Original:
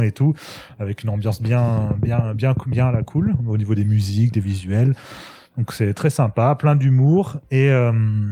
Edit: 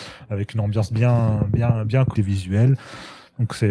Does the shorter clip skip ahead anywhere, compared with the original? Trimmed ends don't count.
yes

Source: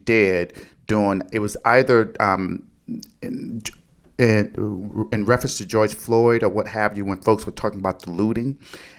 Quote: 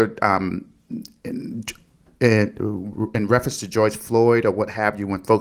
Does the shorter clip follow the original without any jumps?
yes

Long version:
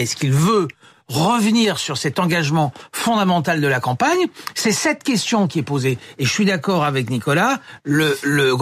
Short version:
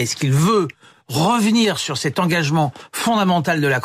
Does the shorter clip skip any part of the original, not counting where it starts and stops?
no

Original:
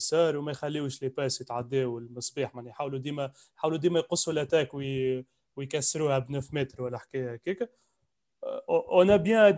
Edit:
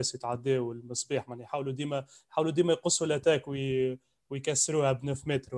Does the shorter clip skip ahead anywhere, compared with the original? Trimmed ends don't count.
no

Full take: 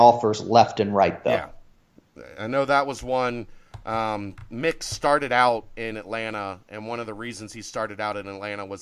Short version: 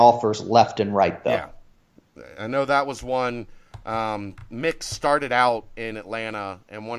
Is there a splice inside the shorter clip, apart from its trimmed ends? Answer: no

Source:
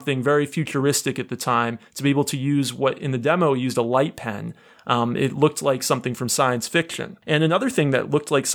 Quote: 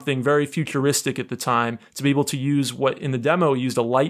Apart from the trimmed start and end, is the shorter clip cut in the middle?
no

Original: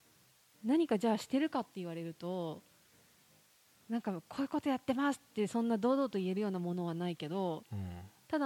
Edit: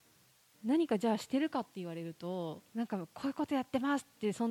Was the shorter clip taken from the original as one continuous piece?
no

